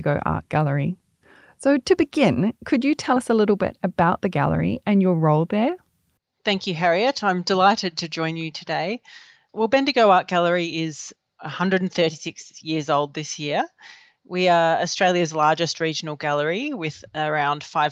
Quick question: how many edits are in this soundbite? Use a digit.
0